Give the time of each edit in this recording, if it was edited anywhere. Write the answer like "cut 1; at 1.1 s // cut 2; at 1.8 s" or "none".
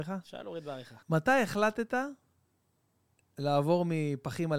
cut 1; at 1.0 s